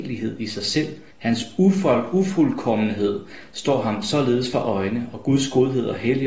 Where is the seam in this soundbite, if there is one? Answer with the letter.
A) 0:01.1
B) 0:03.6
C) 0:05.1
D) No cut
A